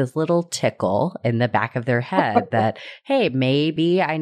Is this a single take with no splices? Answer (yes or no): yes